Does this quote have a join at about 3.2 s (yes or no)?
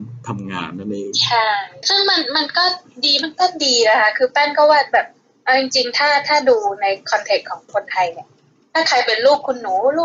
yes